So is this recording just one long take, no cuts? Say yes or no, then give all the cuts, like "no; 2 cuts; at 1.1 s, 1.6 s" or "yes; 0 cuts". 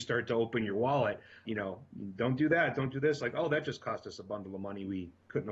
no; 1 cut; at 1.5 s